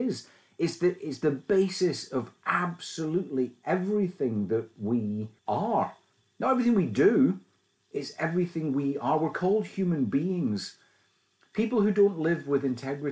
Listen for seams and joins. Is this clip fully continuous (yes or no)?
no